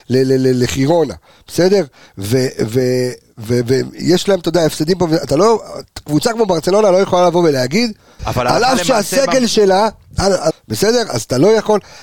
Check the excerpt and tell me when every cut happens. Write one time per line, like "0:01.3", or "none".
0:08.2
0:10.5